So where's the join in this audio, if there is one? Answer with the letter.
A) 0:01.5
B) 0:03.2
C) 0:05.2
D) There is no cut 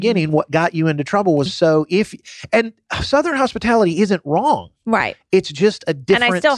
A